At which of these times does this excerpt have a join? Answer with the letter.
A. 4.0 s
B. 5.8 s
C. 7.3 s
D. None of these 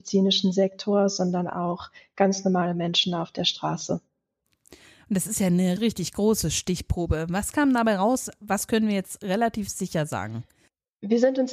B